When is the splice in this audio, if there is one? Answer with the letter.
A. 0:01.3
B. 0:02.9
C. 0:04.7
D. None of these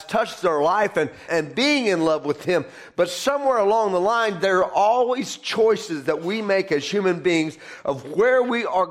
A